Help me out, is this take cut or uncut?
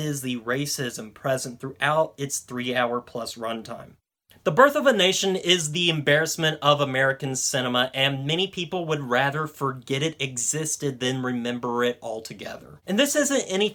uncut